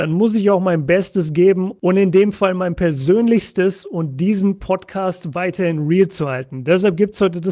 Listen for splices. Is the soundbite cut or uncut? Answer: uncut